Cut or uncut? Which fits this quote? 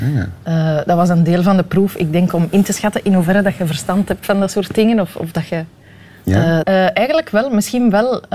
cut